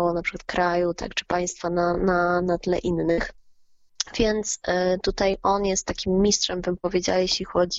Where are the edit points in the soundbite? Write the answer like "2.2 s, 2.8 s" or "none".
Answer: none